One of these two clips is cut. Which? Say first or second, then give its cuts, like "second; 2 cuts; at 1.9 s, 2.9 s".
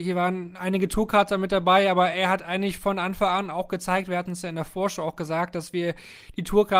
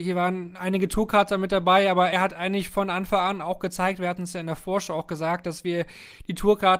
second; 1 cut; at 2.1 s